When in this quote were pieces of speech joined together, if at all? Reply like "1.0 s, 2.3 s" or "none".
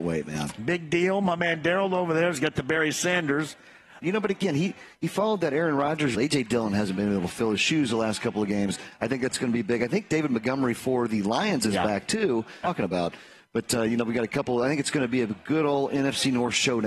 4.0 s, 6.1 s, 12.6 s